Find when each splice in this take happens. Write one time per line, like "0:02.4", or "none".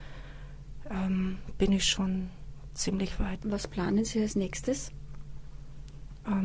0:03.4